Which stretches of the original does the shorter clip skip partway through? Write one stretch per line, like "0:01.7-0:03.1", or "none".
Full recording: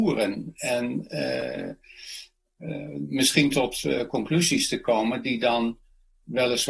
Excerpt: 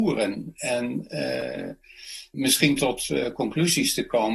0:02.3-0:03.1